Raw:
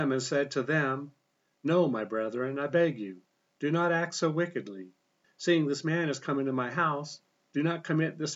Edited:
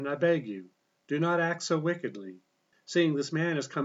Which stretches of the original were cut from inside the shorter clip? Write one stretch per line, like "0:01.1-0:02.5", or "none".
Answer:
none